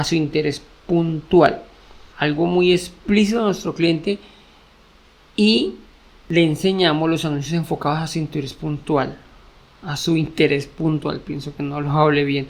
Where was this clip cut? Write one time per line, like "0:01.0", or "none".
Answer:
0:02.1